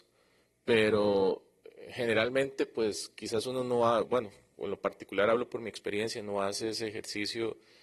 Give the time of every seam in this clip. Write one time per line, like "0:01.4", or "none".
none